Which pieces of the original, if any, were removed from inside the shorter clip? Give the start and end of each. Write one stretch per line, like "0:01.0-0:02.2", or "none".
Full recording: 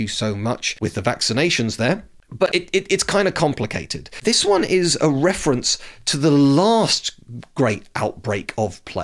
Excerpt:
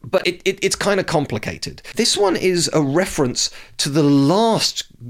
none